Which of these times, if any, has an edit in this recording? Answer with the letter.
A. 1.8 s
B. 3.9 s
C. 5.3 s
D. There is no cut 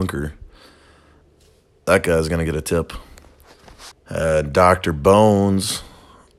B